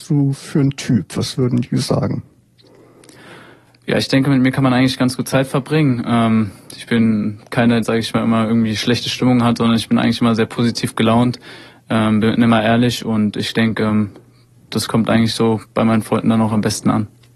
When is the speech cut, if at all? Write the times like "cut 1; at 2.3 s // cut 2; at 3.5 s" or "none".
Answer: cut 1; at 7.8 s